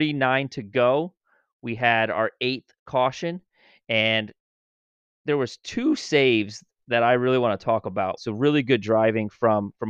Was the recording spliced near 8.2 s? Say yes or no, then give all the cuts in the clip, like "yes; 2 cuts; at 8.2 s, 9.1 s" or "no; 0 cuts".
yes; 1 cut; at 8.2 s